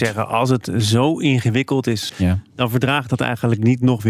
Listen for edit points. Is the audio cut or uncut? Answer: cut